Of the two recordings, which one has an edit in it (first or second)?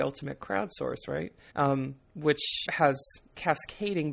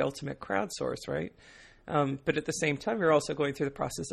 first